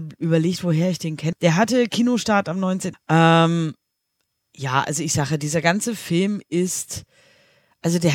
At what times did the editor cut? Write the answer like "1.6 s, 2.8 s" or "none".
1.3 s, 2.9 s